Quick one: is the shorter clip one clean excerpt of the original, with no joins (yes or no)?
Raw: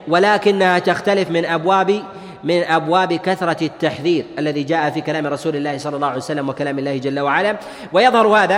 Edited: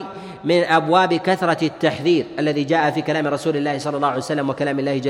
yes